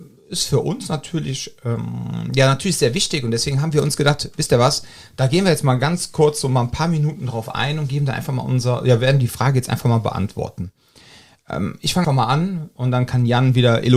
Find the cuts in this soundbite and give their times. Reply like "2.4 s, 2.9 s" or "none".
12.0 s